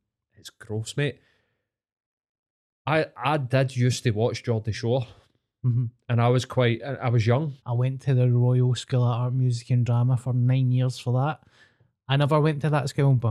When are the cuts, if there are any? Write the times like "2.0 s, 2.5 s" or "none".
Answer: 7.6 s